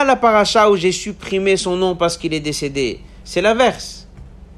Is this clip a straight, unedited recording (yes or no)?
yes